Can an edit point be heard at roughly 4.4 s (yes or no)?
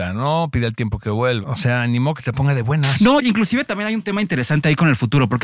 no